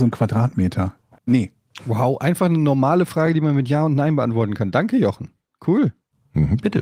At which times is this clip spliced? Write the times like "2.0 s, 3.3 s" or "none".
1.2 s